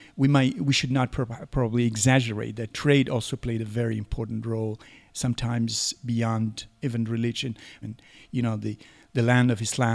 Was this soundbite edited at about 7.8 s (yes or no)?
yes